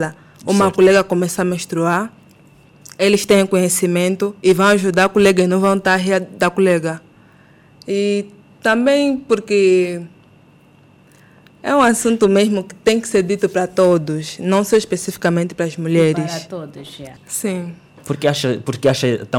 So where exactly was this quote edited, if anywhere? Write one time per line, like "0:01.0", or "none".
0:17.2